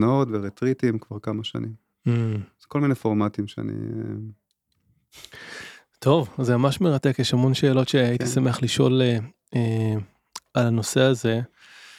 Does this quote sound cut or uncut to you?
uncut